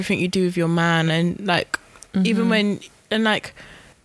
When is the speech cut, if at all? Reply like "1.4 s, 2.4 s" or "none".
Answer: none